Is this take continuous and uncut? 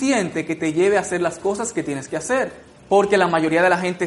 yes; 0 cuts

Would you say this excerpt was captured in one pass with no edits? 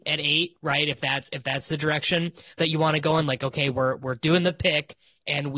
yes; 0 cuts

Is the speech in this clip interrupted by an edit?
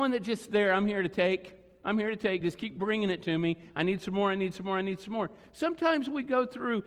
no; 0 cuts

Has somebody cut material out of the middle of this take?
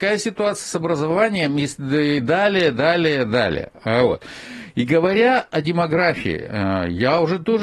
no; 0 cuts

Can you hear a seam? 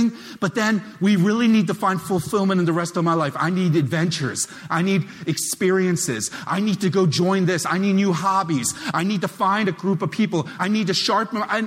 no; 0 cuts

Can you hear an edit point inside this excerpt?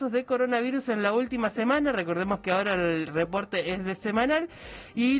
no; 0 cuts

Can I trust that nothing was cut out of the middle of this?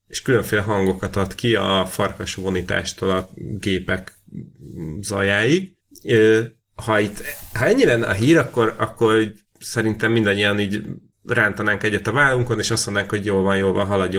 yes; 0 cuts

